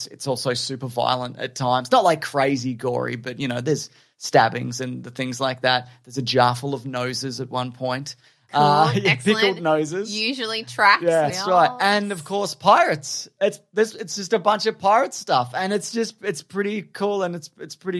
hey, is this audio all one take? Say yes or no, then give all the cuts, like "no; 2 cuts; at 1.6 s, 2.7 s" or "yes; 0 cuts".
no; 1 cut; at 11.3 s